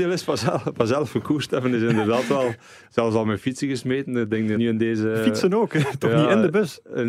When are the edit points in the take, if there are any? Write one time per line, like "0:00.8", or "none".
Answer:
0:04.6